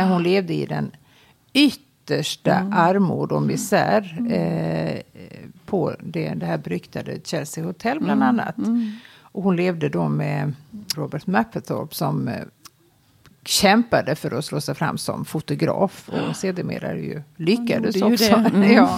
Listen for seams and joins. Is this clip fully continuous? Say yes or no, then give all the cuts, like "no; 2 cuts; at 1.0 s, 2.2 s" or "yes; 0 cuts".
no; 1 cut; at 10.9 s